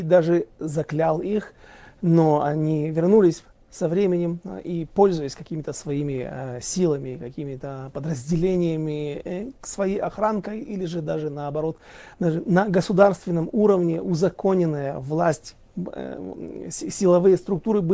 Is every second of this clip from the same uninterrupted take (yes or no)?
yes